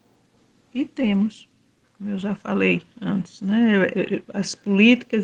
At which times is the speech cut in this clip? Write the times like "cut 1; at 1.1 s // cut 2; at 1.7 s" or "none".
cut 1; at 1.8 s